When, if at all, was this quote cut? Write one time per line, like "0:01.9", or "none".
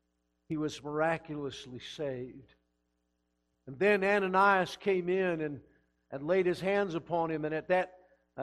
none